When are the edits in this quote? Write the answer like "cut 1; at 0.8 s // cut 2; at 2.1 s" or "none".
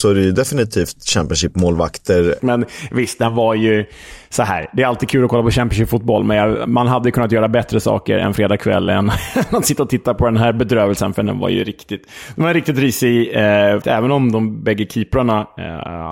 cut 1; at 2.4 s // cut 2; at 13.8 s